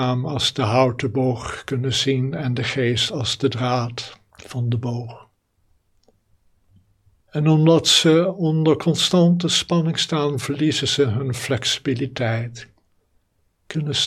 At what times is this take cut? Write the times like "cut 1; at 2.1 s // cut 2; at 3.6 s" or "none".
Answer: none